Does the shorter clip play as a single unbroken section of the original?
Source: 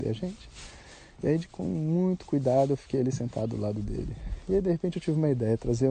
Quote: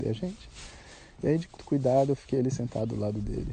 no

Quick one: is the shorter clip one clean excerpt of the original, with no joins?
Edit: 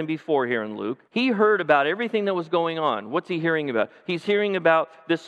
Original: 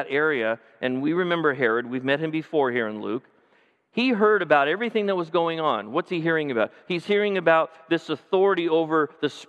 no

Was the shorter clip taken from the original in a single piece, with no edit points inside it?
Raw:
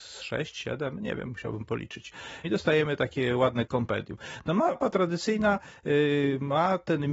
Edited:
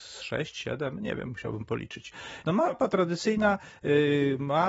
no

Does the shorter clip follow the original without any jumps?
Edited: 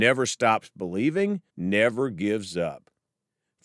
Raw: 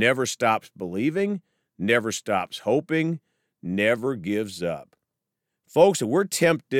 no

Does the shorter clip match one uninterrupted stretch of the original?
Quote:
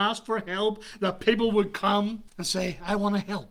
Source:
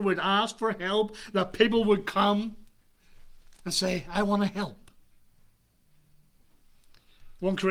no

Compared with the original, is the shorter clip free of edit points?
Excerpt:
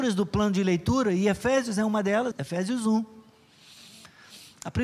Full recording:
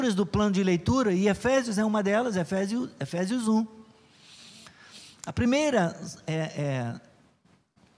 no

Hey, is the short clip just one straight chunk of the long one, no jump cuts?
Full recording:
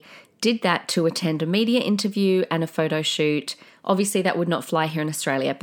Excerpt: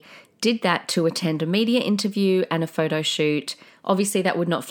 yes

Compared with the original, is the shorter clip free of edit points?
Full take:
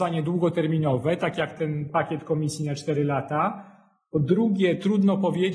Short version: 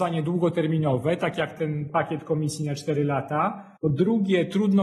no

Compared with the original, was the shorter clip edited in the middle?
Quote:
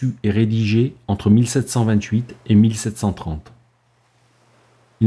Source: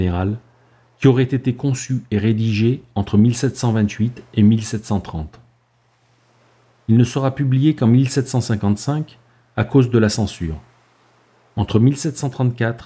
no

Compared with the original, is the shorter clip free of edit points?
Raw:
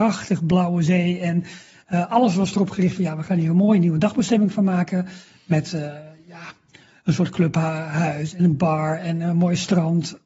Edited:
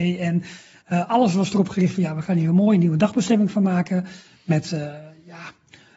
yes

